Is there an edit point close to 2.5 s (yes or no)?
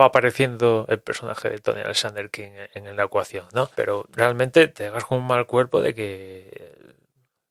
no